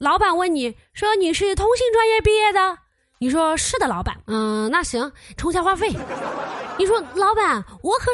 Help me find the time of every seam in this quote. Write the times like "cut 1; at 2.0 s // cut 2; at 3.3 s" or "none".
cut 1; at 4.2 s // cut 2; at 5.4 s